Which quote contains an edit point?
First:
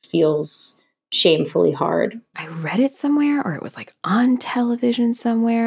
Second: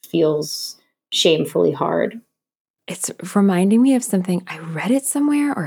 first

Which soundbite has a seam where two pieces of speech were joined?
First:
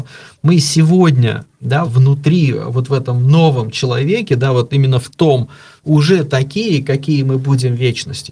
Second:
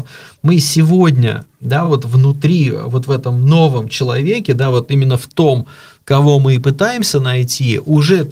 first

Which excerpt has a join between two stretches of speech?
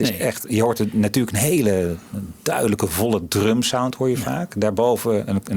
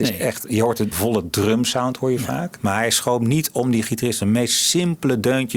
second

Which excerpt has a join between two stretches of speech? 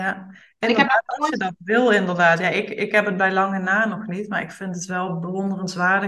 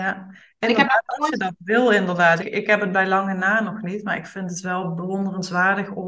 second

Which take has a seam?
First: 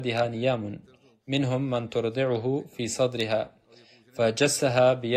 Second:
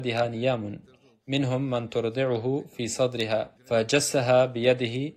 second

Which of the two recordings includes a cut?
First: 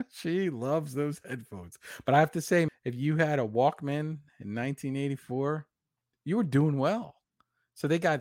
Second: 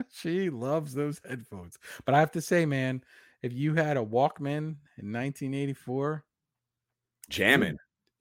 first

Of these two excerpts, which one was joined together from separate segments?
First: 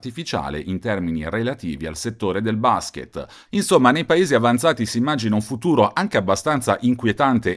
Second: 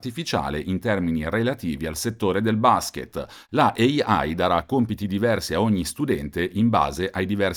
first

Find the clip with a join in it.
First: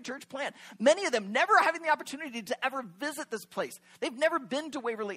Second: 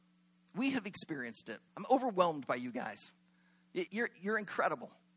second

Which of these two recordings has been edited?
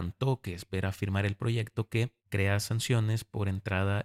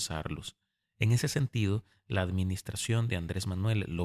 first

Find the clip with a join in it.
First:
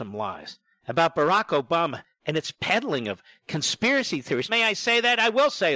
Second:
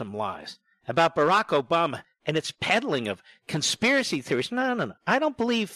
first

